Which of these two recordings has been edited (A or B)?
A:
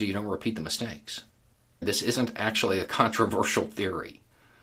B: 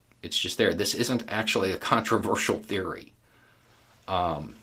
A